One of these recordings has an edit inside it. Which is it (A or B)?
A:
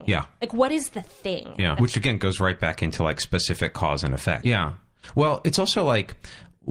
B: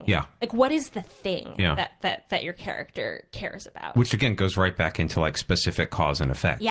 A